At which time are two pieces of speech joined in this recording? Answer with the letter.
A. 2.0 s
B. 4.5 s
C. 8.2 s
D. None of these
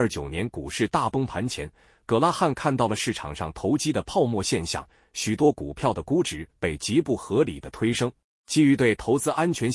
C